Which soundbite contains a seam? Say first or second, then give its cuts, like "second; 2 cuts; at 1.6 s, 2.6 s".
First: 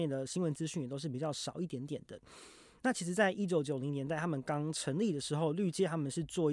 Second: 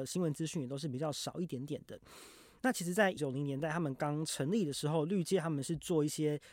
second; 1 cut; at 3.2 s